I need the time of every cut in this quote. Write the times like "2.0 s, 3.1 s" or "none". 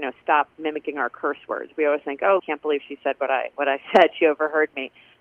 2.4 s